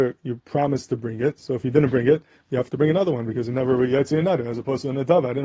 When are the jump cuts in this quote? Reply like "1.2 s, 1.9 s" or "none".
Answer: none